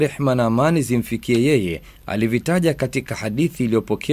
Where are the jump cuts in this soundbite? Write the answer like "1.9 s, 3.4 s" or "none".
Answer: none